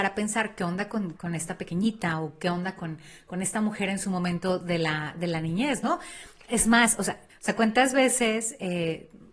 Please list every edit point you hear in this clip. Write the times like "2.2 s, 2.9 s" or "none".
1.2 s, 7.3 s